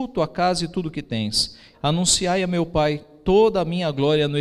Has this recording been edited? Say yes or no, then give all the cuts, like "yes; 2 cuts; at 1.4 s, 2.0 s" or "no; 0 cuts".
yes; 1 cut; at 1.7 s